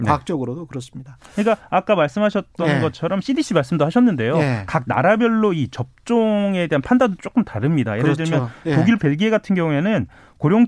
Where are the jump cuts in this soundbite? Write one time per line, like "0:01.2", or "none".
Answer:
0:09.0